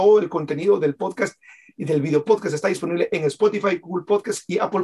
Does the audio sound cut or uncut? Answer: uncut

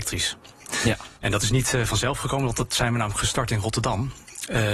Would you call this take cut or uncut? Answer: cut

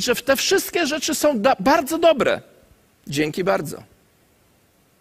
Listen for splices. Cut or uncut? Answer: cut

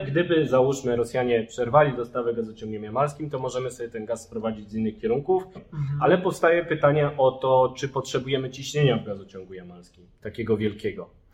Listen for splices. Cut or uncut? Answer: cut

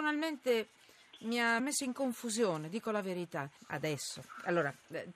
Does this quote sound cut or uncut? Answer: cut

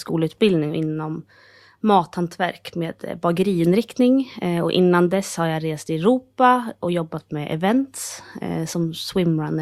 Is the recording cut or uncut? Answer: uncut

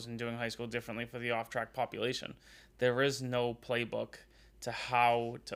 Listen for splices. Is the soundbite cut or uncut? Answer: uncut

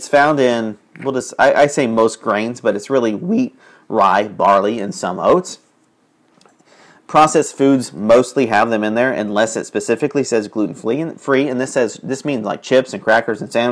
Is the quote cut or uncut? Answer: uncut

